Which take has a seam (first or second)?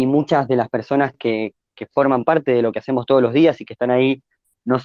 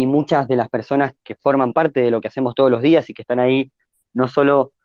second